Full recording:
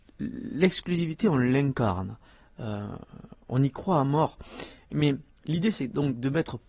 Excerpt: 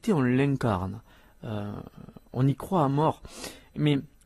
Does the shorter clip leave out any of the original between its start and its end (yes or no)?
no